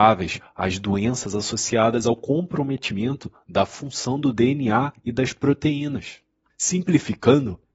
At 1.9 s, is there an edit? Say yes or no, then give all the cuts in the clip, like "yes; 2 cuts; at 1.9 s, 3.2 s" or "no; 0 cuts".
no; 1 cut; at 6.4 s